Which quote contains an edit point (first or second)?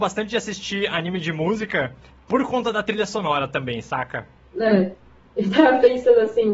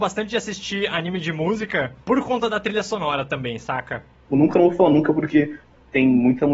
second